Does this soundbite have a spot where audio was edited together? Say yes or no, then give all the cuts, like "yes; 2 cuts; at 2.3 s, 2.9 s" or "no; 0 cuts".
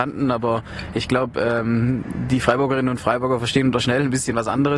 no; 0 cuts